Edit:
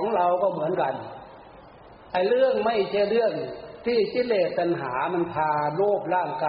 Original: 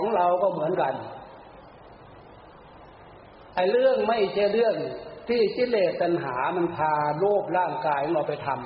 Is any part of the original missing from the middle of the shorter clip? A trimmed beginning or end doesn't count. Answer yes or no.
yes